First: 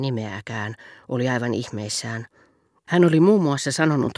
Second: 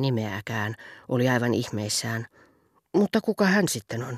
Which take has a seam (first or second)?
first